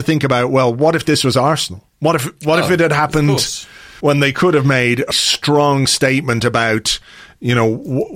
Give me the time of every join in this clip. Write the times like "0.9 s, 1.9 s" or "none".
1.9 s, 4.0 s, 5.1 s